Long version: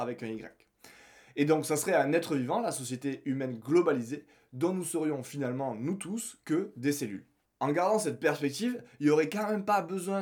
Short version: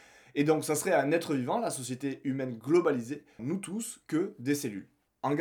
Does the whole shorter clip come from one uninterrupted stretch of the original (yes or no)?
no